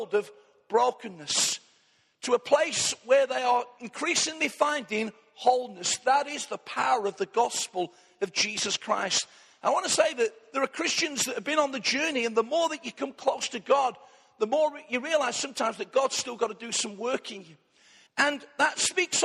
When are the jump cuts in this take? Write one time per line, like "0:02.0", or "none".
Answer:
0:18.1